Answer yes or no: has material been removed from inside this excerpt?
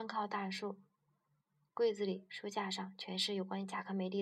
no